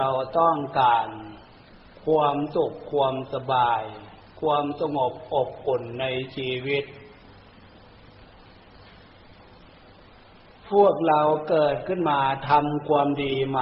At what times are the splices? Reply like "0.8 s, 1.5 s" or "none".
none